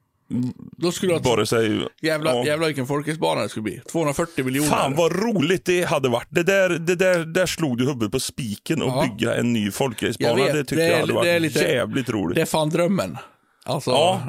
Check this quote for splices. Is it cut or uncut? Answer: uncut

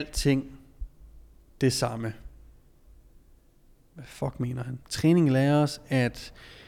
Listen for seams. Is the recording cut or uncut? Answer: cut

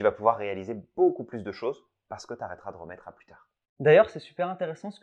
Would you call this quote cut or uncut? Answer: uncut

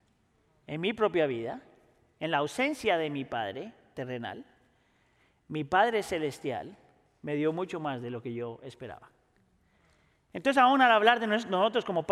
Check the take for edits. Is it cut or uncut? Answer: uncut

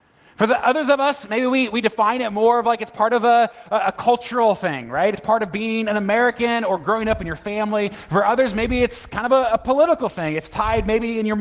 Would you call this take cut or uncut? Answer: uncut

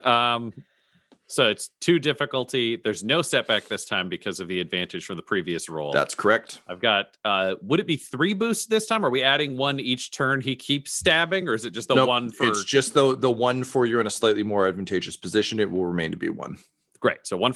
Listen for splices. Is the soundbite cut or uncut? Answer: uncut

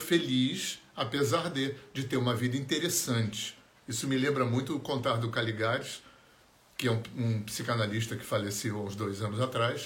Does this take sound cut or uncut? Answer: uncut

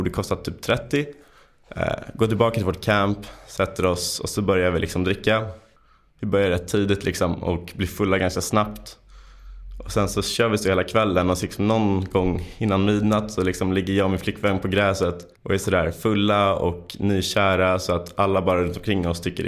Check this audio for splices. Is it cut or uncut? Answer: cut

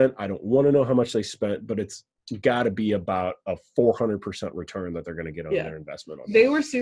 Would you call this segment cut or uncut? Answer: uncut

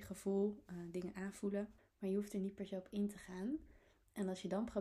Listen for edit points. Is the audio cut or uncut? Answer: cut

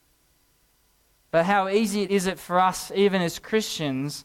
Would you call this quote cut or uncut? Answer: cut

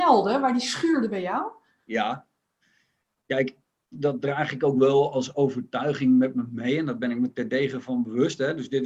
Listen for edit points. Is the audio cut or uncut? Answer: cut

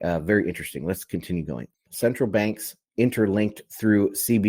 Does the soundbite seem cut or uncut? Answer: cut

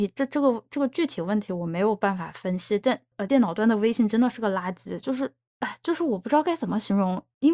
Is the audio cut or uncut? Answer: uncut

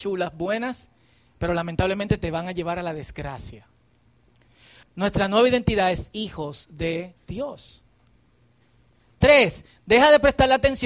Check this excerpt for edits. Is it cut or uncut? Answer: cut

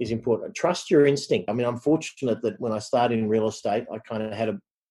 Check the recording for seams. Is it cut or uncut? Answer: cut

